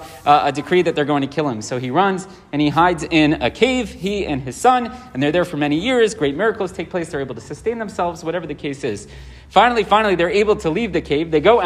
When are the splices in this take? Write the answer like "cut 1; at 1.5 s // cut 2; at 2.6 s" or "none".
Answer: none

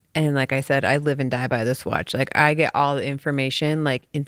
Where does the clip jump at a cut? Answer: none

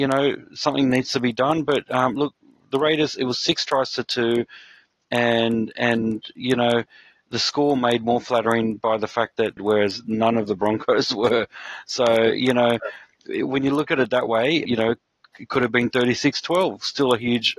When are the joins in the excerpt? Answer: cut 1; at 9.6 s // cut 2; at 14.7 s

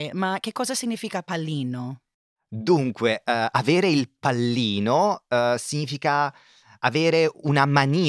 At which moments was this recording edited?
none

